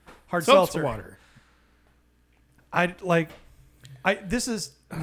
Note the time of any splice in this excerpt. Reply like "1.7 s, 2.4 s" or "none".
2.6 s

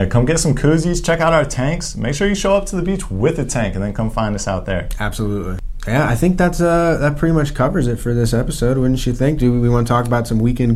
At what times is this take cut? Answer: none

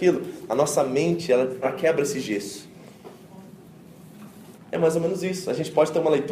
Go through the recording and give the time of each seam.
1.6 s, 4.5 s

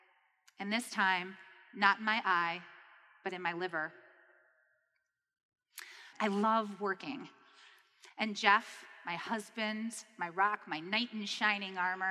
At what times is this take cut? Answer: 6.1 s, 8.1 s

